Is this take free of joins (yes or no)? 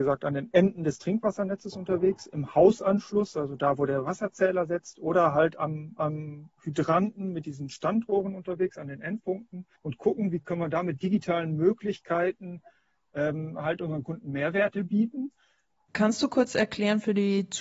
no